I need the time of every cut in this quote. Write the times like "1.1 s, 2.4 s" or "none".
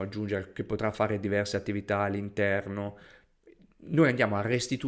none